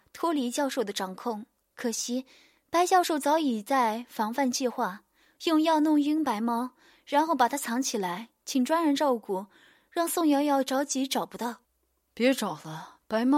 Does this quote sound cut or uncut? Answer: uncut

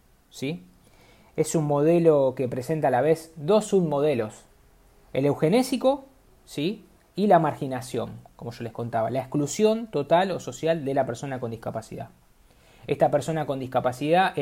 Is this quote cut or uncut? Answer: uncut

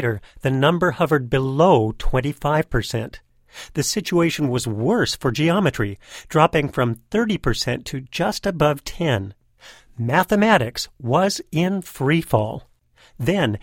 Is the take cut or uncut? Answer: uncut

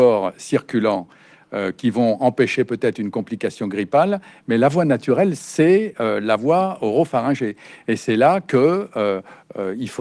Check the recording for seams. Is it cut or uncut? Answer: uncut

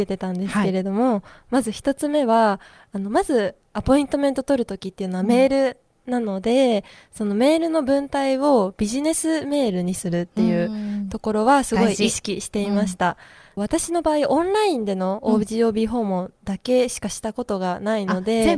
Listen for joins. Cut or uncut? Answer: cut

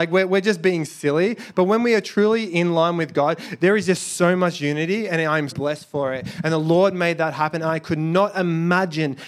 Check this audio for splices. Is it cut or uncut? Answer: cut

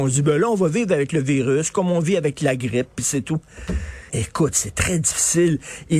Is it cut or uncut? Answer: cut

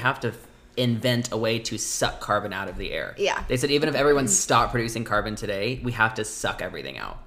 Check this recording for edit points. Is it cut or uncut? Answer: uncut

